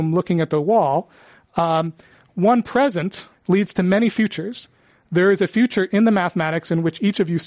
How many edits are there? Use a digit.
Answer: 1